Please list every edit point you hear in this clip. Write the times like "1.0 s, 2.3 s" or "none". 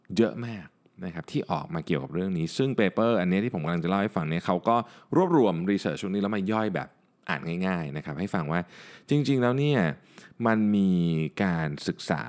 none